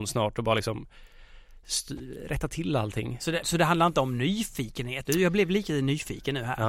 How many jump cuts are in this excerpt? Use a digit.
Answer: 2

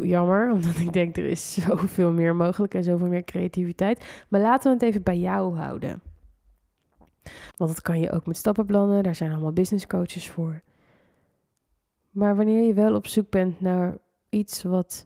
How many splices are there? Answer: 1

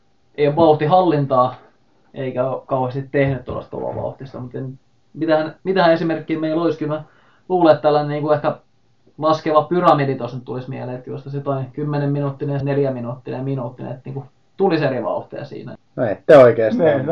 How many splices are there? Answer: 2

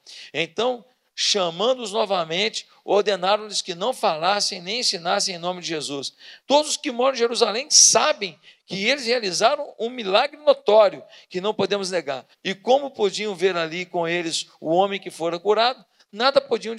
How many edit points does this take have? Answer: 2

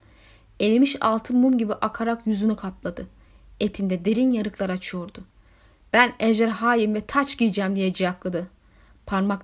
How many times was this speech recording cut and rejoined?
0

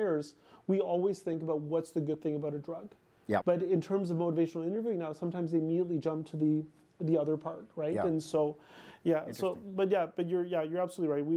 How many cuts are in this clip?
1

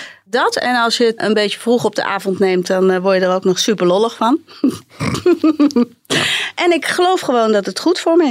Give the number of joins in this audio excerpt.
0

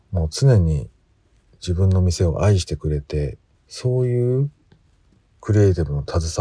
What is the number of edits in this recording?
1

